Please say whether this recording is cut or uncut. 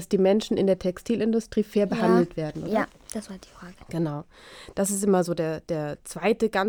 uncut